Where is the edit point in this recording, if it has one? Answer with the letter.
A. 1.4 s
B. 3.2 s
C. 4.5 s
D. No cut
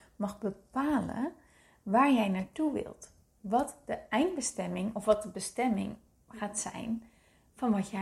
D